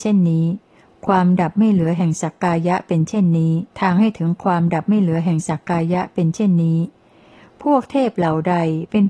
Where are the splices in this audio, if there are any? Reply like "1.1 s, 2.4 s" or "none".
3.7 s